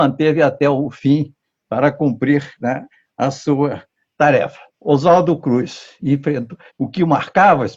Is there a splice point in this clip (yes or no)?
yes